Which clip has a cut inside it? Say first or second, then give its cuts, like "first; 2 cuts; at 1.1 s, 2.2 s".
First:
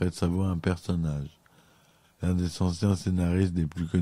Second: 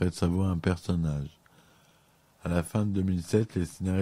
first; 1 cut; at 2.0 s